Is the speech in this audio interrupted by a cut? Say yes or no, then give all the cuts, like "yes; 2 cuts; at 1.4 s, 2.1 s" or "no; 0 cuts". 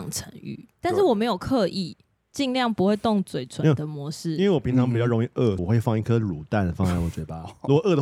yes; 2 cuts; at 2.3 s, 5.6 s